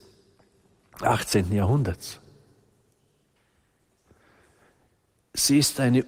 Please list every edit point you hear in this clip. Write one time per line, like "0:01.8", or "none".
none